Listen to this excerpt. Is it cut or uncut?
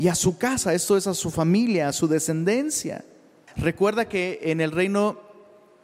cut